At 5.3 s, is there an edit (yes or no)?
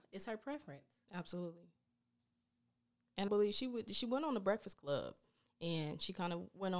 no